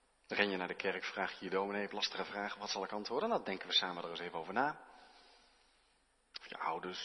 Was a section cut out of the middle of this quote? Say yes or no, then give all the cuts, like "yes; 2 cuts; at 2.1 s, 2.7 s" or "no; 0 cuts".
no; 0 cuts